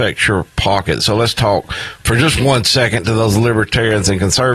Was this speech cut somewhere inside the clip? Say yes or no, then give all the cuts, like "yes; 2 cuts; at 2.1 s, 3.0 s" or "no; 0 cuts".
no; 0 cuts